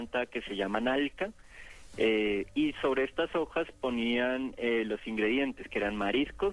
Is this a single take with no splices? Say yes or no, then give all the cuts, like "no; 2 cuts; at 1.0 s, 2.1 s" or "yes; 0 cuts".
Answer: yes; 0 cuts